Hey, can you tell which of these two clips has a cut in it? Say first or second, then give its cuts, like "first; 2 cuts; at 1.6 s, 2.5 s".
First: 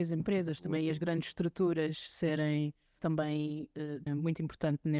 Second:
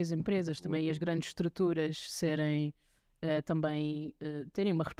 first; 2 cuts; at 3.0 s, 4.1 s